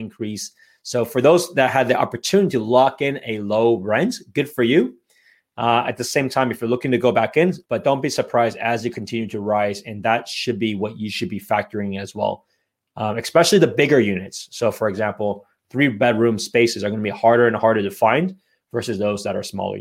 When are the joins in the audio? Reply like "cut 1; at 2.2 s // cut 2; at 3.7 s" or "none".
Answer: cut 1; at 7.7 s